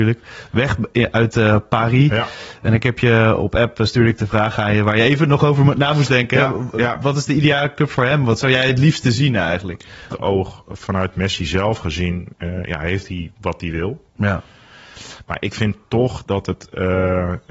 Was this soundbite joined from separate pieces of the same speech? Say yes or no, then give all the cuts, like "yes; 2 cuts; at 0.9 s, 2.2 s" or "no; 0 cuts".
yes; 1 cut; at 10.1 s